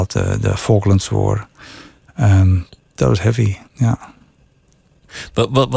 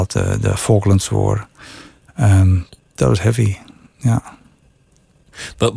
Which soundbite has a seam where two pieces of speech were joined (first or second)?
first